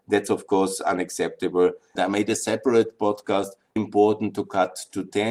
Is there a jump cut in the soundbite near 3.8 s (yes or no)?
yes